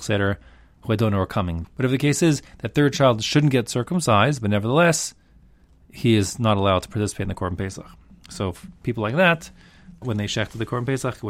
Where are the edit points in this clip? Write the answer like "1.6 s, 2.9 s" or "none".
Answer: 1.6 s, 10.0 s

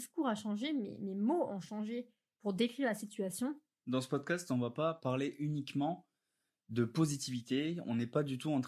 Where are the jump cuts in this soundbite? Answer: 3.8 s

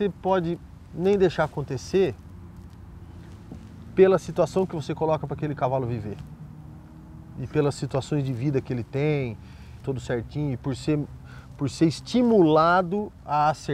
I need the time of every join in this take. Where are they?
9.8 s

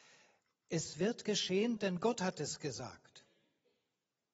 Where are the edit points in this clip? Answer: 1.8 s

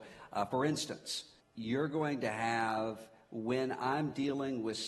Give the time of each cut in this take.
1.4 s

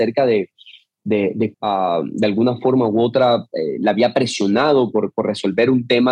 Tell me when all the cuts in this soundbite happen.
1.5 s

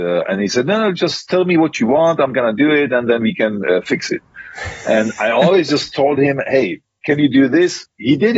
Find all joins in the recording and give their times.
none

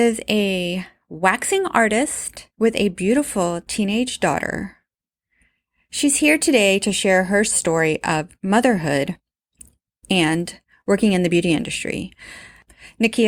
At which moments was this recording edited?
2.5 s

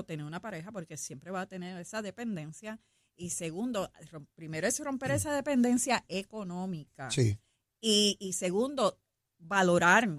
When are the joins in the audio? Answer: none

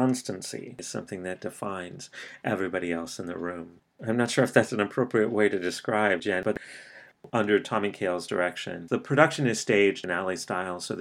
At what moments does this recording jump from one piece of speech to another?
none

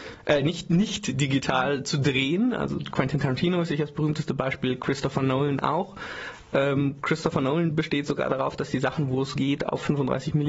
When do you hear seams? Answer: none

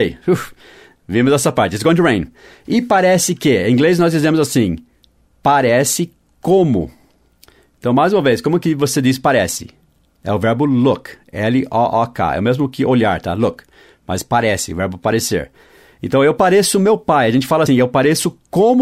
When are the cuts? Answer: 17.7 s

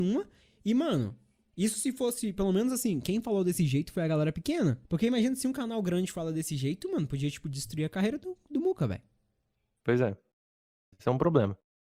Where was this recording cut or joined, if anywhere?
4.8 s, 10.9 s

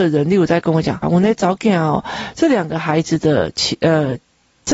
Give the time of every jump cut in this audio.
1.0 s

